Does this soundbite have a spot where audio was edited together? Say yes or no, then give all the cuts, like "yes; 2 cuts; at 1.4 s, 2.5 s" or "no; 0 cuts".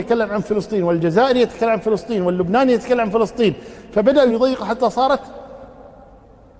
yes; 1 cut; at 4.3 s